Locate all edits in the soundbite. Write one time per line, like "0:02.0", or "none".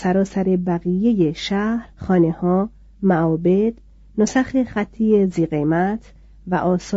0:01.9